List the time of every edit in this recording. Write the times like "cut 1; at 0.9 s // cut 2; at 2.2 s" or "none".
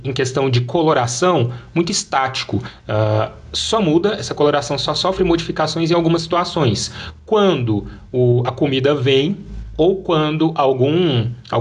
cut 1; at 2.8 s // cut 2; at 9.7 s